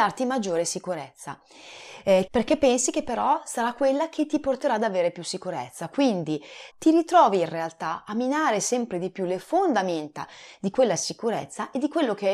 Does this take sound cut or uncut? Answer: cut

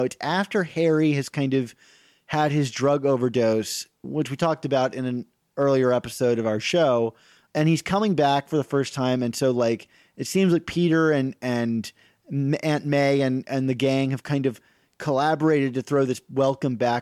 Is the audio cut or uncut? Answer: uncut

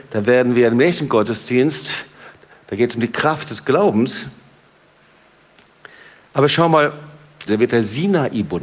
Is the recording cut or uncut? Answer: cut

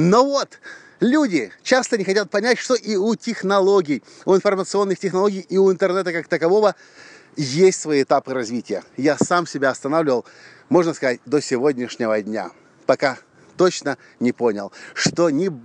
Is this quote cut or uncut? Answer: uncut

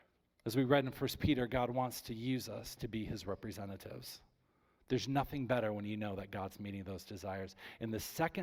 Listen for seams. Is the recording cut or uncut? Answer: cut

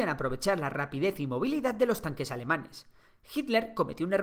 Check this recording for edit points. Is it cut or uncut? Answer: uncut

